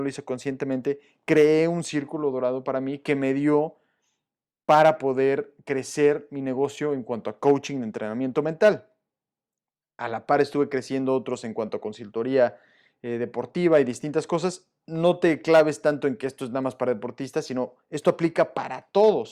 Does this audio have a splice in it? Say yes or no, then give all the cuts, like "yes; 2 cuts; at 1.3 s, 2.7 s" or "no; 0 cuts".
no; 0 cuts